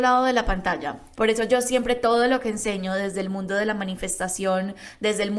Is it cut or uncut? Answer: cut